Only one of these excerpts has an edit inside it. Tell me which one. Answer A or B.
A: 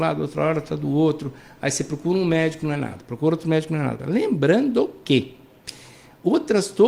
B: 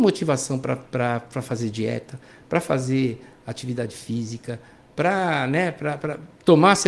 A